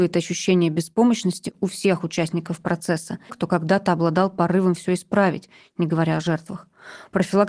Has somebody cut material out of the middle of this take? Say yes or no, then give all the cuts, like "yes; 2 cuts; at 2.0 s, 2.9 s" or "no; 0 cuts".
yes; 1 cut; at 3.3 s